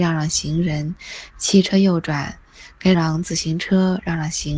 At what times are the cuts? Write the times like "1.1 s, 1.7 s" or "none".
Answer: 2.9 s